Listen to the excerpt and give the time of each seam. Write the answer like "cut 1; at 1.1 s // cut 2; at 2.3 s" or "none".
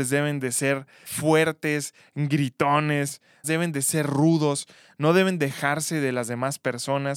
cut 1; at 1.0 s // cut 2; at 3.4 s